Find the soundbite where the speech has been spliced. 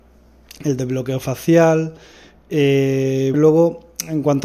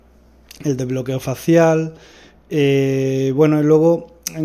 first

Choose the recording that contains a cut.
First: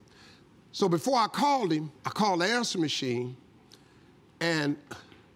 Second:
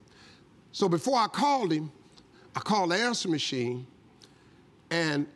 first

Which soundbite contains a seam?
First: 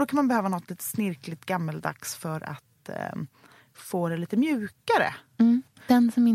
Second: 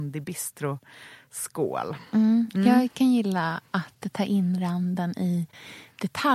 second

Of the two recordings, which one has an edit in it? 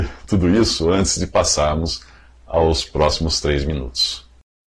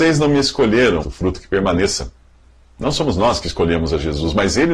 second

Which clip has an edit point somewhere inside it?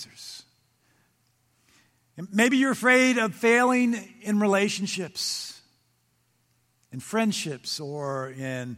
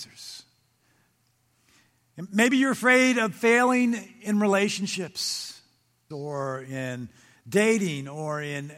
second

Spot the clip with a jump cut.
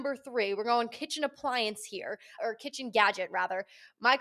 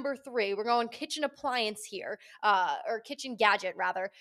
first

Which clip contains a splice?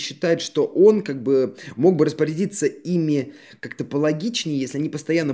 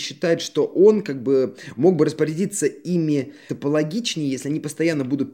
second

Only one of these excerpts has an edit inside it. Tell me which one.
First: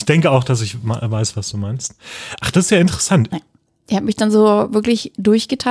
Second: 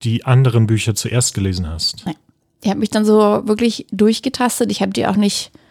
first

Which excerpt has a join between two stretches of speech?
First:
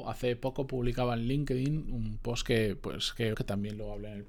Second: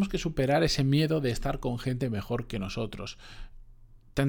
first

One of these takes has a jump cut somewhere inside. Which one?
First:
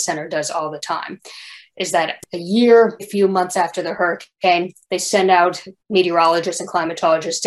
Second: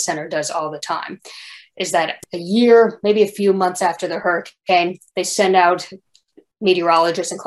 first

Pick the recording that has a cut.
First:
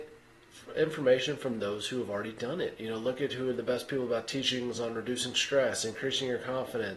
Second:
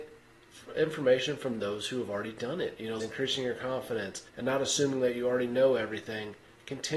second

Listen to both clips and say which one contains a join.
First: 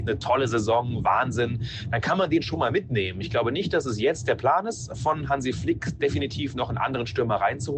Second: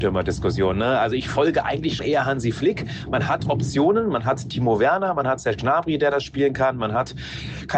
second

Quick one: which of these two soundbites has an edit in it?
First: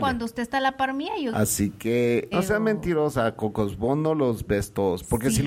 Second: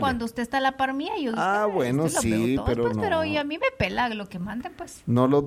first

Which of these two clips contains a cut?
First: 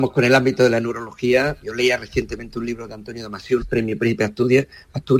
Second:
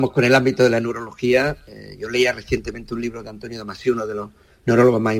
first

